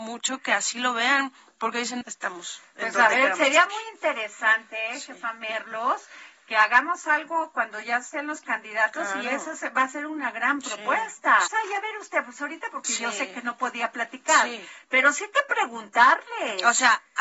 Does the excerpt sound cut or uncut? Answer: cut